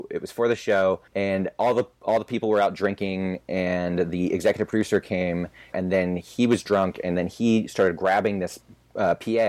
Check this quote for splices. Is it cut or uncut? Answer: cut